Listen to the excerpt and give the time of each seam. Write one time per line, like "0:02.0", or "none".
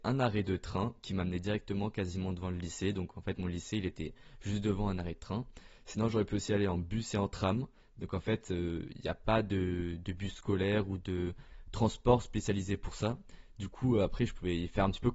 none